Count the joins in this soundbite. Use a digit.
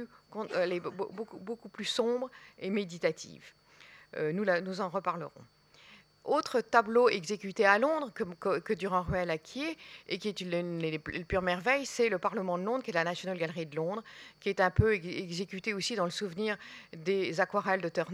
0